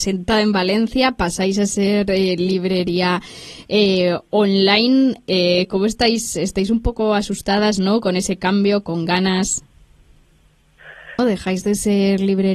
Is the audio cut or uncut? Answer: cut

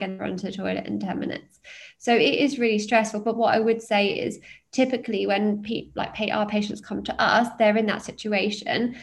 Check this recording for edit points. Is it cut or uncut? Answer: uncut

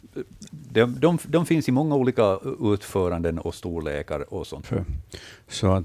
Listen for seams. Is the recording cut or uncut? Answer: cut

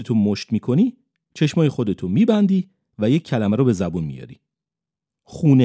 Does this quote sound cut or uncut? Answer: uncut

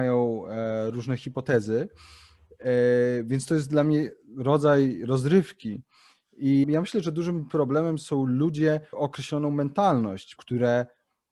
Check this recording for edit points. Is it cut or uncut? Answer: cut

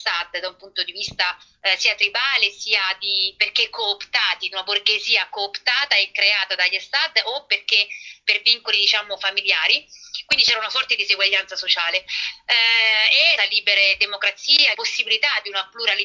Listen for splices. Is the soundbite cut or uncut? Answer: cut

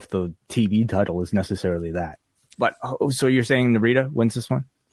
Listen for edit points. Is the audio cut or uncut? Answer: cut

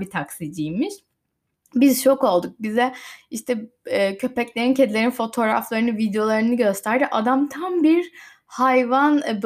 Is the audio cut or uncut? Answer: uncut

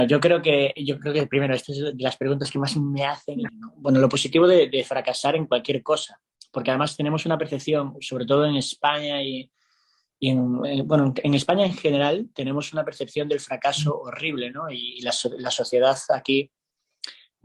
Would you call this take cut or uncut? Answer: cut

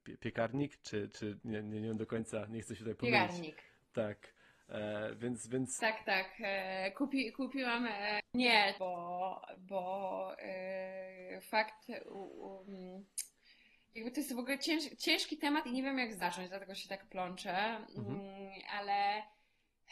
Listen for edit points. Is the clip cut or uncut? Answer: cut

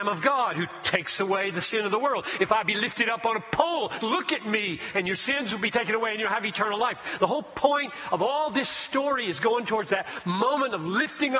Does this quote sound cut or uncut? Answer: cut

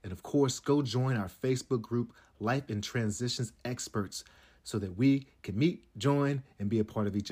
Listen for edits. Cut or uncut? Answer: uncut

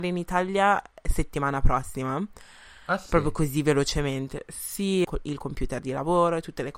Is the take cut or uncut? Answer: cut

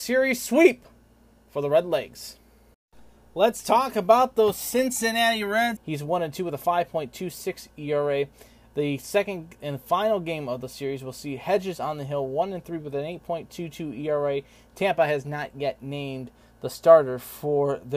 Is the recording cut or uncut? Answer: cut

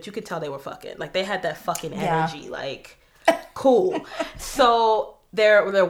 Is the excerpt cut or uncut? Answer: uncut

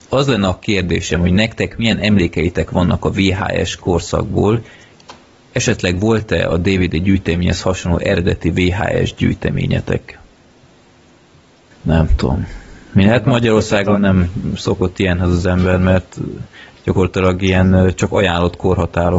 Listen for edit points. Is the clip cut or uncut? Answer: cut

